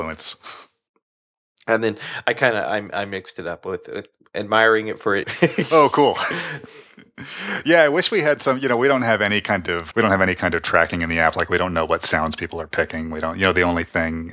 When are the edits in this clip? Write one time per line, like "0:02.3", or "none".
0:05.2
0:09.9